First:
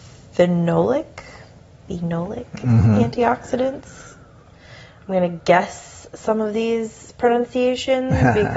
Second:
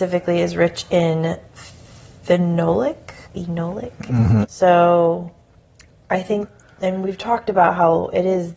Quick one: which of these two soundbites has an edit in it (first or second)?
second